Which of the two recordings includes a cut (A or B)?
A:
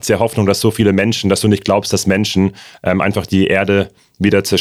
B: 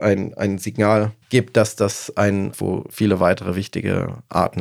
B